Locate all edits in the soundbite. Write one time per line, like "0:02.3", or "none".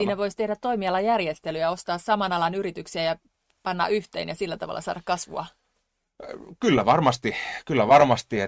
none